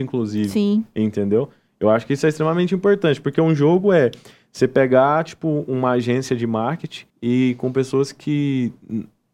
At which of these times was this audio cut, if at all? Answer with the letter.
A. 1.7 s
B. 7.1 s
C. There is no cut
B